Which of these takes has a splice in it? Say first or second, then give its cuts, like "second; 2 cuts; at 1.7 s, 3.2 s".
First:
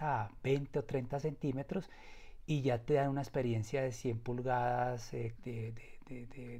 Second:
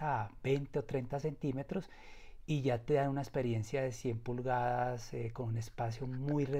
first; 1 cut; at 5.4 s